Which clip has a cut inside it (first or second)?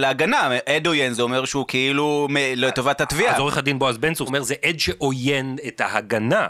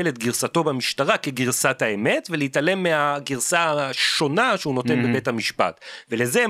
first